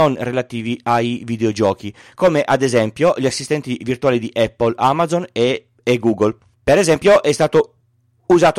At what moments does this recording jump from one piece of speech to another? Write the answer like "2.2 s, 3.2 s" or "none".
6.5 s